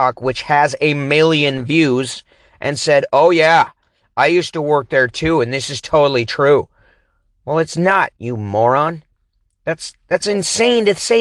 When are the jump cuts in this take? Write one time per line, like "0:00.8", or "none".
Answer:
none